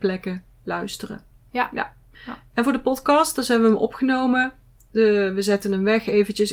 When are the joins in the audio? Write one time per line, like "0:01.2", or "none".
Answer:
none